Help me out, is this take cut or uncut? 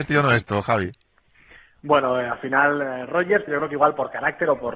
cut